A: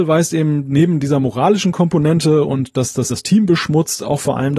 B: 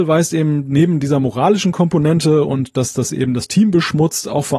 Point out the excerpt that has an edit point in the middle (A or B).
A